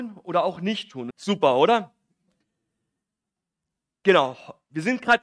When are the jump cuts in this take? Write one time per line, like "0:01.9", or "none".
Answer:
0:01.1